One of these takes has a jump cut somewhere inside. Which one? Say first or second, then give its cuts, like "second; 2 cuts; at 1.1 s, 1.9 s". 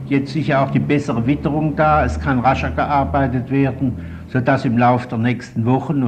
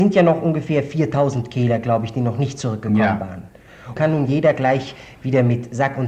second; 1 cut; at 4.0 s